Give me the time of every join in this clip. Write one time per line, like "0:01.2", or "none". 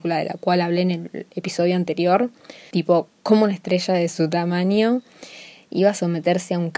0:02.7